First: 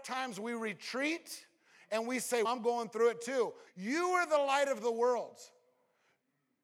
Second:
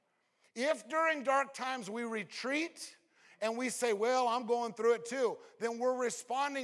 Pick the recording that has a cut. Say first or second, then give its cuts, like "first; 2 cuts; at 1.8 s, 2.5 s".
first; 2 cuts; at 2.4 s, 3.7 s